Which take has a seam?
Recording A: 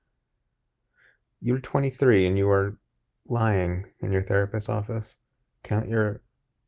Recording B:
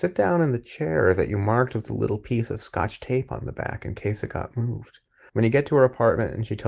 B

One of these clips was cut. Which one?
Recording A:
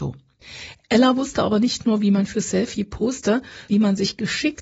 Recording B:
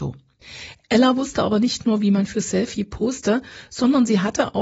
A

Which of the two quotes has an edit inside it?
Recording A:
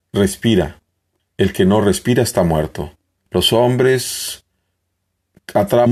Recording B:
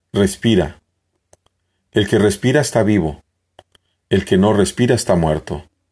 A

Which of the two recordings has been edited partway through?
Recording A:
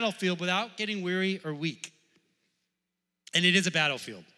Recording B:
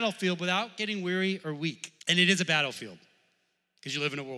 B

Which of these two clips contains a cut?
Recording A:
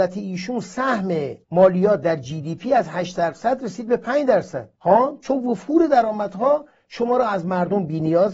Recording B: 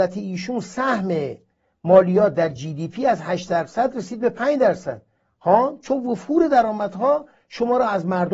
A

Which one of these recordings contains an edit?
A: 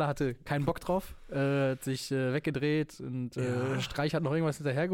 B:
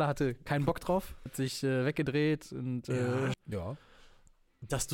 B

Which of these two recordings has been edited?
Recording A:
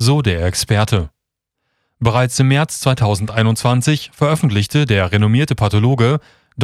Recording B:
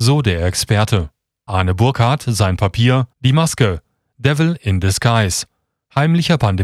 B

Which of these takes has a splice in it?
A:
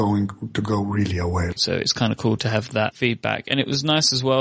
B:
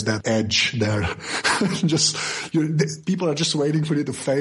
A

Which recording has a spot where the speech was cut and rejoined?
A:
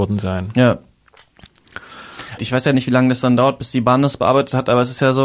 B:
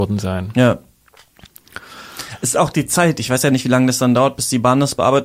A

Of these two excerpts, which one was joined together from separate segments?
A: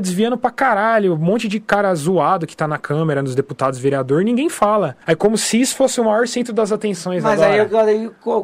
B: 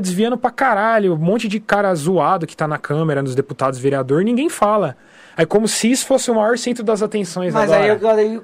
A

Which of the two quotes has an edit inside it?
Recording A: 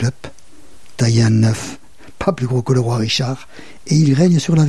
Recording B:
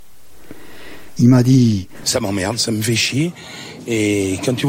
B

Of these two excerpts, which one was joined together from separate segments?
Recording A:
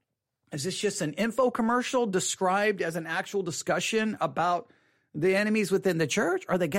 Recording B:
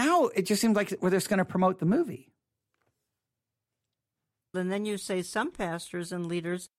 B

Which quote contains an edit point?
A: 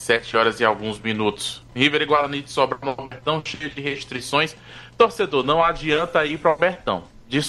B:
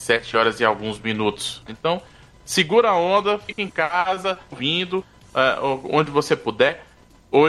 B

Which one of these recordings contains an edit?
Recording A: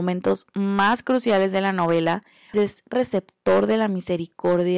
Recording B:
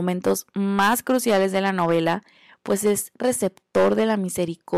A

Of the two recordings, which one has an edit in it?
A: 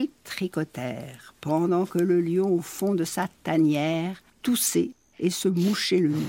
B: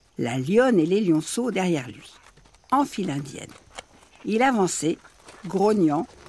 A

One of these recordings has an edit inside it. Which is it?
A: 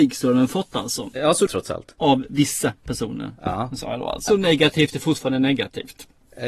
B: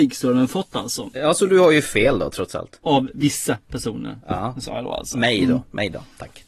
A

